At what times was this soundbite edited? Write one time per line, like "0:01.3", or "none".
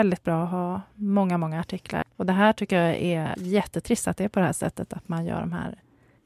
0:02.0